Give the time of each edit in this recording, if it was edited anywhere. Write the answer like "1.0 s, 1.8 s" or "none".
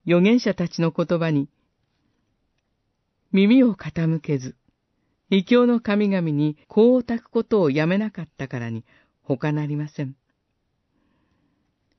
5.1 s, 6.6 s